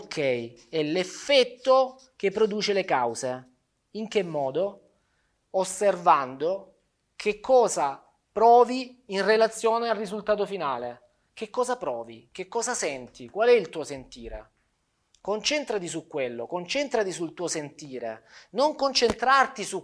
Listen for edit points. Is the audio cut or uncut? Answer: uncut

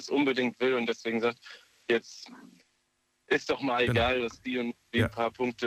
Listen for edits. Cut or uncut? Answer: uncut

